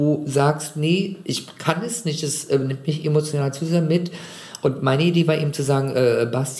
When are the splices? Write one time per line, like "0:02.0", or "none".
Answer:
none